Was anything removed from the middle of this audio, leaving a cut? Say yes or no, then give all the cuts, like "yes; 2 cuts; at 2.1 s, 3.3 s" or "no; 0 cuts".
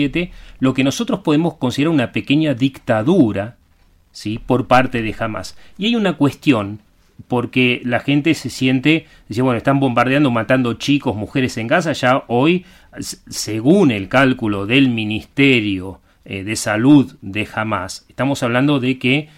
no; 0 cuts